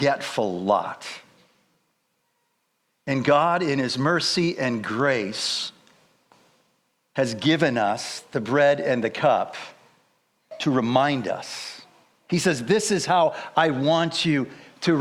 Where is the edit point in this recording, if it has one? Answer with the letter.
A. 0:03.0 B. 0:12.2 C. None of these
C